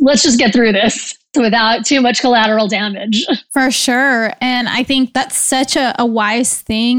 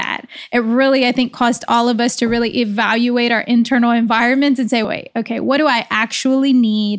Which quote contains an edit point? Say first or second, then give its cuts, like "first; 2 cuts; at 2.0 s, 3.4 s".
second; 1 cut; at 4.8 s